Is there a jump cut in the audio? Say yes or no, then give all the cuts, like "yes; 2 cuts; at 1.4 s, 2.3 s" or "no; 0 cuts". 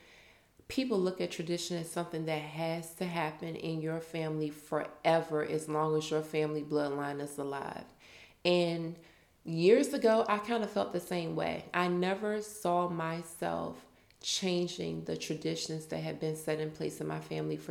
no; 0 cuts